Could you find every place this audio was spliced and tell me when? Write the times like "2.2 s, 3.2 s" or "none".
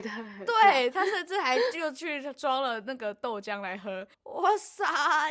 4.1 s